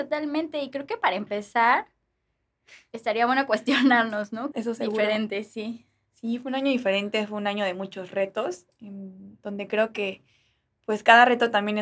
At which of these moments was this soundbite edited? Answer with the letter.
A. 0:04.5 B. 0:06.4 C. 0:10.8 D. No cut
A